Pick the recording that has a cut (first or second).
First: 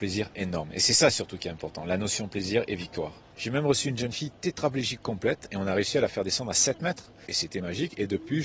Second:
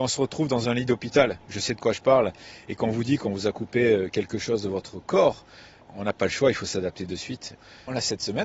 first